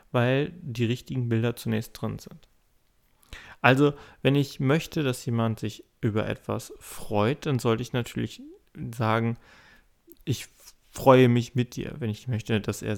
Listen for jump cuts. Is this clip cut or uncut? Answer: uncut